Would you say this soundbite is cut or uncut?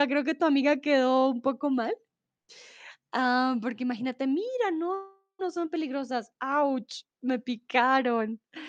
uncut